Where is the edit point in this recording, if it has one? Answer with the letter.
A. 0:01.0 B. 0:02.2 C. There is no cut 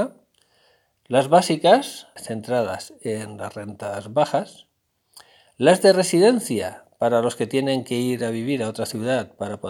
B